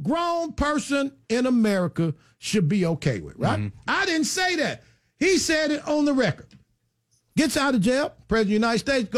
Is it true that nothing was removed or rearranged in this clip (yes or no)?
no